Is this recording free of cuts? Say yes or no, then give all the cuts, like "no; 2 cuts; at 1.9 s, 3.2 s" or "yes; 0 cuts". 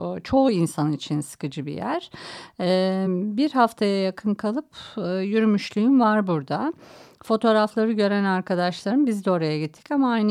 yes; 0 cuts